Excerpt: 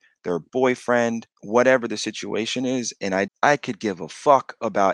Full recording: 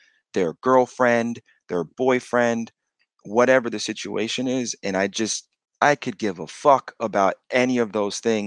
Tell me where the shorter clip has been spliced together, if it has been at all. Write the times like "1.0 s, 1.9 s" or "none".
1.3 s, 3.3 s